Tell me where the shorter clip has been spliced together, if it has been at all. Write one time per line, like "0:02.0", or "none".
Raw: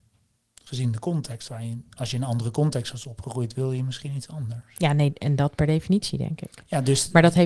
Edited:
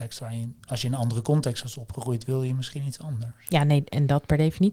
none

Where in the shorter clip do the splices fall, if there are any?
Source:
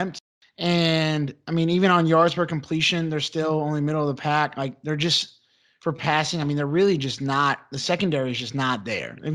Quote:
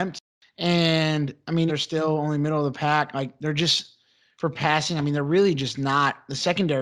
0:01.7

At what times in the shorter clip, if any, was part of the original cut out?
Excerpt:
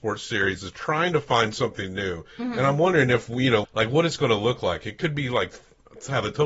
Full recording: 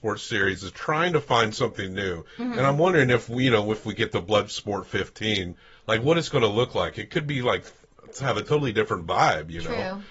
0:03.6

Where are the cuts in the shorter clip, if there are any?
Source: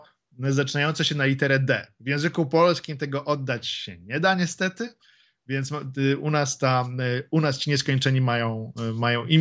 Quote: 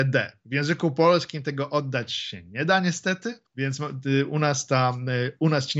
0:03.5

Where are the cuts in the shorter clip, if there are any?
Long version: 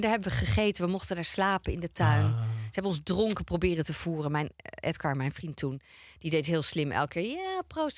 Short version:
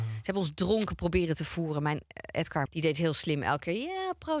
0:02.7

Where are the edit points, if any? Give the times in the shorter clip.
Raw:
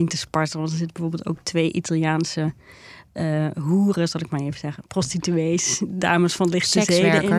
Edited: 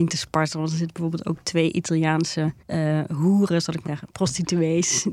0:02.6
0:03.9

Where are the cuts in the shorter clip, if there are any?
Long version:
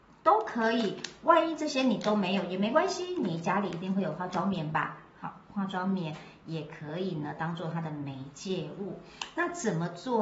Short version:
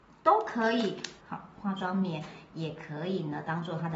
0:01.2

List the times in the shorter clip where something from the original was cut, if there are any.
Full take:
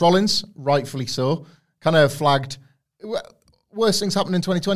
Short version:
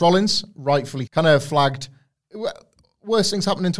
0:01.1

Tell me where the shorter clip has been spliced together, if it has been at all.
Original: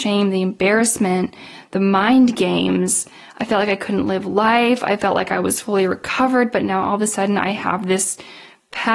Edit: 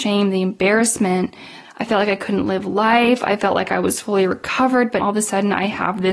0:01.6
0:05.0

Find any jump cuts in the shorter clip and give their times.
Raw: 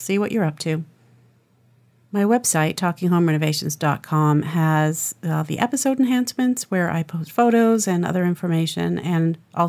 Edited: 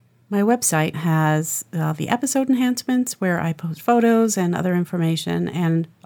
0:00.9

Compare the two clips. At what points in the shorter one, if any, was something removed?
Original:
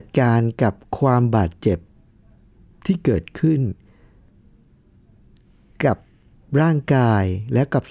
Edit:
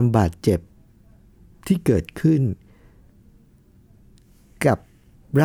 none

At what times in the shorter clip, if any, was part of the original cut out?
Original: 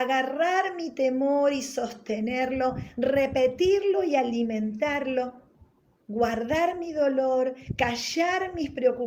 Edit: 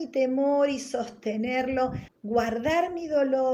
0:02.1

